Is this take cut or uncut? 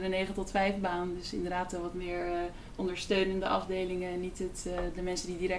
uncut